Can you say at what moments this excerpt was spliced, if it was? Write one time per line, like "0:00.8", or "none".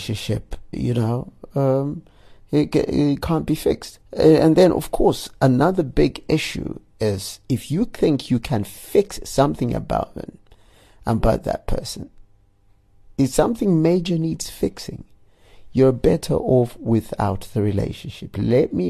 0:04.0